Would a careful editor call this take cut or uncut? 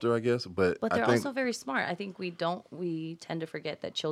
uncut